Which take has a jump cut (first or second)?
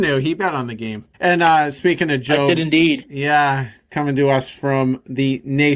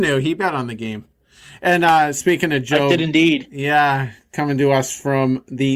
first